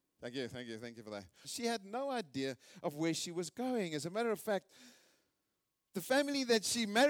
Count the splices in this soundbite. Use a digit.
1